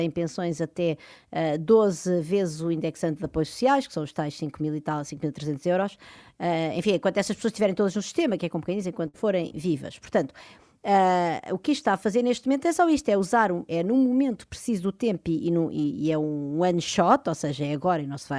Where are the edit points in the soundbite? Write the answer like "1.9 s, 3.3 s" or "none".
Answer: none